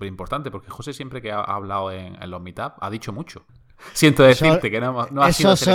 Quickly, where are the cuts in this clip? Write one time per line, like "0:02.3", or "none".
0:03.5